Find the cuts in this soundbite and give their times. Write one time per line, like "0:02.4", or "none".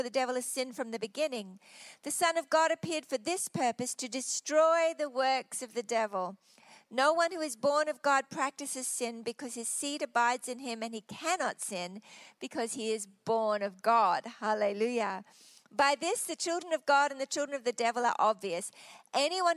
none